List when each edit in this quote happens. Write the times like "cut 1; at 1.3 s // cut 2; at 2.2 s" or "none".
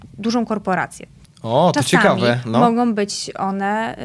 cut 1; at 1.3 s